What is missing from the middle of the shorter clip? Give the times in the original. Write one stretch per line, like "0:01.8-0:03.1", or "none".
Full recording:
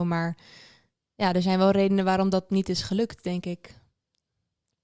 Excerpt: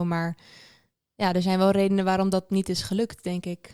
none

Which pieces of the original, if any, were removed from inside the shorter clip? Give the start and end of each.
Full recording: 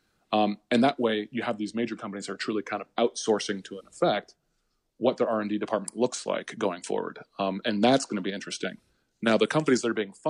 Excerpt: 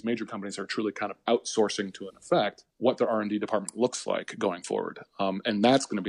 0:04.4-0:04.9

